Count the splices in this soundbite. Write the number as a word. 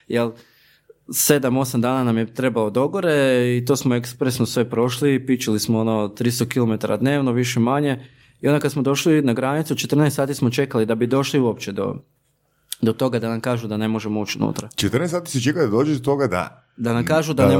zero